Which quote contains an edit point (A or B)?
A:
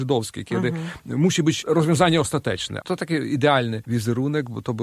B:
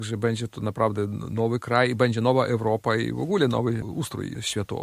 A